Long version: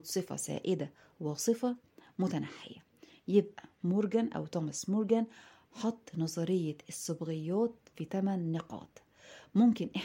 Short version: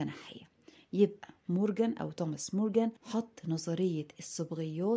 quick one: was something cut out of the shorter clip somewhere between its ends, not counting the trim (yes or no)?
yes